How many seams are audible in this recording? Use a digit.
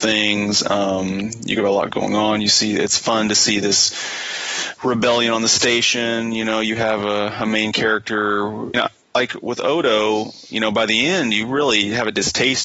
1